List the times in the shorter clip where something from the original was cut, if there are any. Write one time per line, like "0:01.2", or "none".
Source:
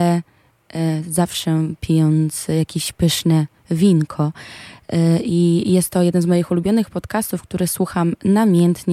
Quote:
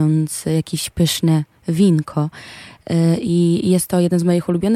none